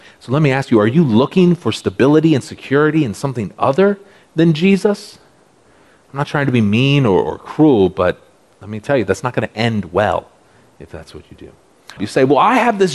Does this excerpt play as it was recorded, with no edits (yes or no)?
no